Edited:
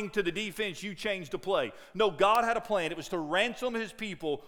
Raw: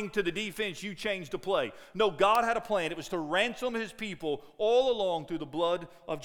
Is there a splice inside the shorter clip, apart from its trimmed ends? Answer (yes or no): no